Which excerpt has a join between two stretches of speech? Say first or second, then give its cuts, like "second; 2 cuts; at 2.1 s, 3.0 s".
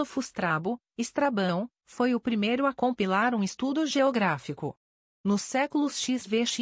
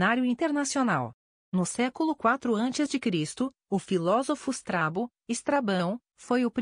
first; 1 cut; at 5.1 s